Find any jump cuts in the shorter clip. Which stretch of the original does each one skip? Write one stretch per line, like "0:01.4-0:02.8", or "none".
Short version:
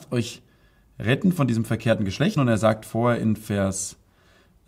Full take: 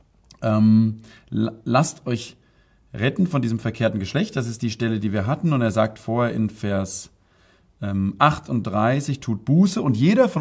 0:04.3-0:05.5